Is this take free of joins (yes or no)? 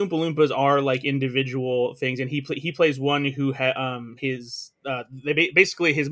no